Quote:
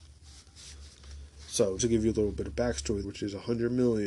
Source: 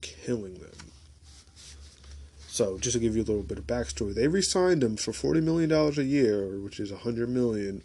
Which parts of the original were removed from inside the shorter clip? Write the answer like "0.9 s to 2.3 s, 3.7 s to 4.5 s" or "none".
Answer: 2.8 s to 2.9 s, 4.1 s to 6.6 s